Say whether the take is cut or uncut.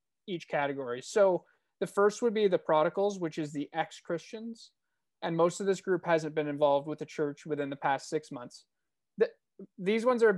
cut